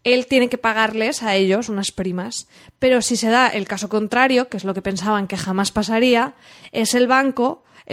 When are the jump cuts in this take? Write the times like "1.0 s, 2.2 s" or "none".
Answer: none